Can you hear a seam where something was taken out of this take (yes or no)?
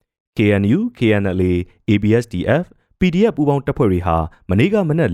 no